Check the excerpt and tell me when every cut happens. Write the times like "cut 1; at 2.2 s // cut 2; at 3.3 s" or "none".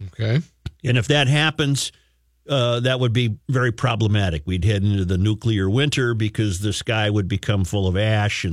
none

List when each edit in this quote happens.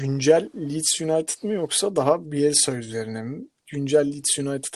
none

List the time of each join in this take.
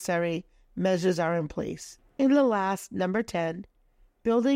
cut 1; at 2.1 s

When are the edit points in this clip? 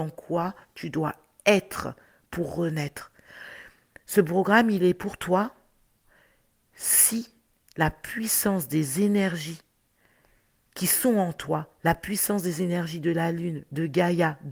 none

